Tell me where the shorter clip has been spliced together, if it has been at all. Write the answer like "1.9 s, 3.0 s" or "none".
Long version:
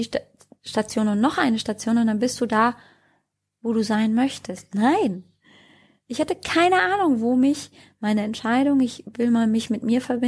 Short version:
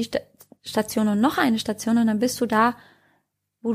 none